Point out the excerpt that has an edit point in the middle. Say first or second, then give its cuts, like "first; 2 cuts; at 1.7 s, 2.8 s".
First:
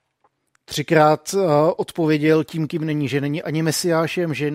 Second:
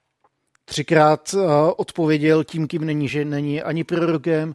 second; 1 cut; at 3.1 s